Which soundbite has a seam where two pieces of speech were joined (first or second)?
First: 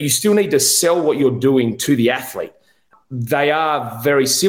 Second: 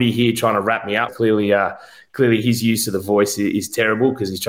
second